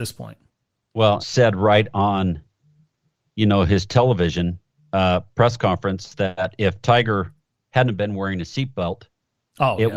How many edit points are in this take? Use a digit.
1